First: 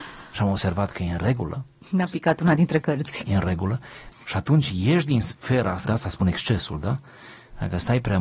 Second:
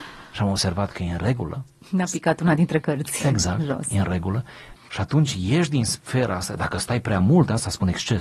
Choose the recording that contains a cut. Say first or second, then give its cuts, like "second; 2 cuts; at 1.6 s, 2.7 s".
first; 2 cuts; at 3.2 s, 5.8 s